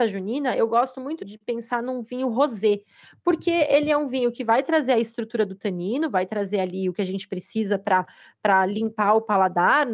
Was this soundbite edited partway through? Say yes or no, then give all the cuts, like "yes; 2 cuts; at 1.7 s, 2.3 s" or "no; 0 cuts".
yes; 1 cut; at 1.2 s